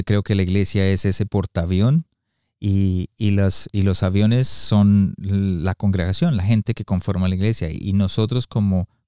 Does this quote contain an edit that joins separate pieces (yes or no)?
no